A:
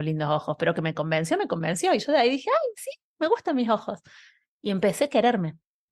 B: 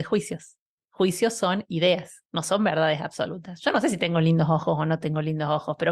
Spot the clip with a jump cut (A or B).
B